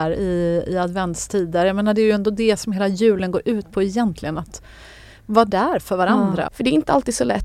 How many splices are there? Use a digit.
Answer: 1